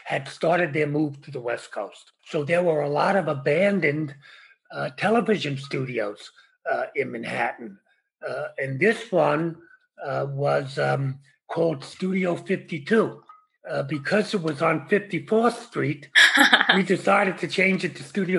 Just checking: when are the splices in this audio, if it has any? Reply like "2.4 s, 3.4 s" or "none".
none